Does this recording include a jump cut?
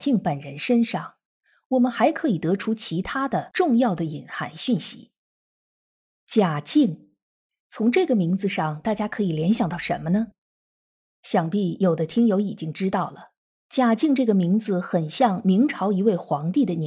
no; 0 cuts

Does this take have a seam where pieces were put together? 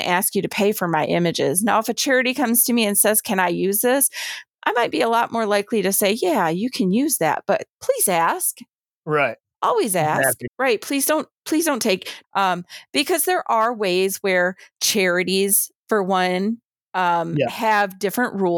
yes; 2 cuts; at 10.5 s, 12.2 s

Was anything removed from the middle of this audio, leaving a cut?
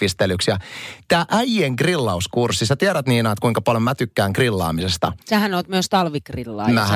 yes; 1 cut; at 5.2 s

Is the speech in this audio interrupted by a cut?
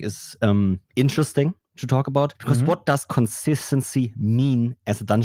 no; 0 cuts

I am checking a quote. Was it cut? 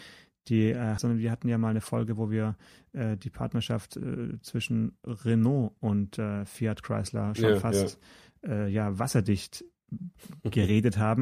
yes; 1 cut; at 1.0 s

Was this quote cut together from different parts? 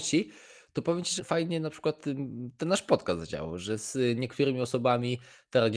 yes; 1 cut; at 1.2 s

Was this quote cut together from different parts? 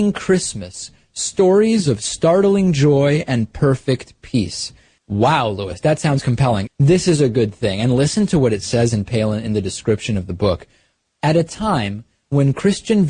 yes; 2 cuts; at 5.0 s, 6.7 s

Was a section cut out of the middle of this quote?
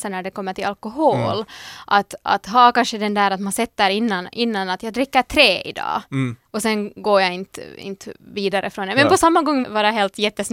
yes; 2 cuts; at 6.5 s, 9.6 s

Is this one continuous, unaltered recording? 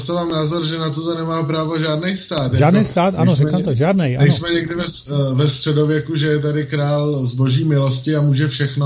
yes; 0 cuts

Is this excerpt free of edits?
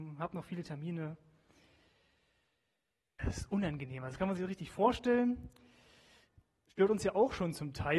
no; 1 cut; at 3.2 s

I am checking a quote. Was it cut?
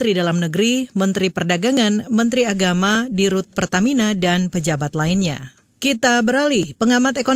no; 0 cuts

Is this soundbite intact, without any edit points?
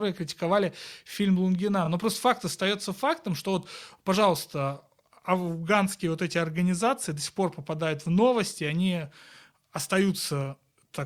yes; 0 cuts

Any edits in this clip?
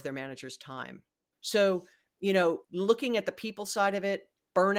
yes; 2 cuts; at 1.3 s, 2.6 s

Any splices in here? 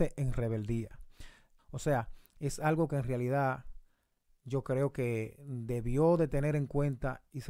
yes; 1 cut; at 1.6 s

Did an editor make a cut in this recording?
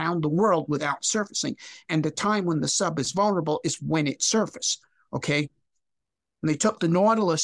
no; 0 cuts

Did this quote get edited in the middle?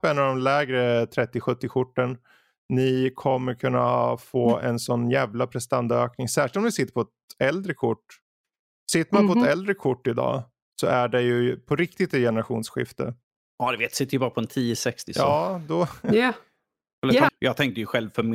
yes; 1 cut; at 17.3 s

